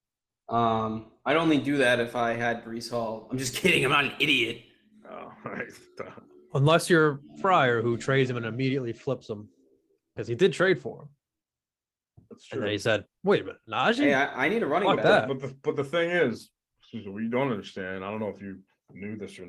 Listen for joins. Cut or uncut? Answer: uncut